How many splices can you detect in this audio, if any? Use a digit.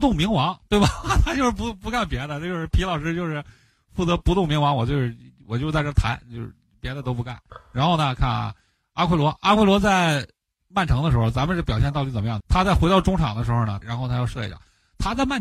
2